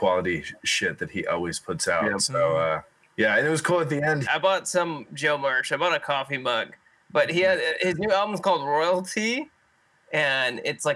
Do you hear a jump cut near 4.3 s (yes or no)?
yes